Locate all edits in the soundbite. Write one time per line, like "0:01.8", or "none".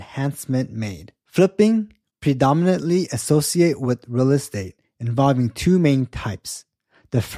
none